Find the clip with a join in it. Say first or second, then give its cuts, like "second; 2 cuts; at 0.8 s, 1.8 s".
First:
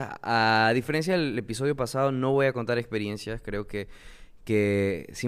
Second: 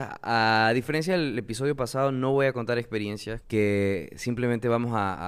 second; 1 cut; at 3.4 s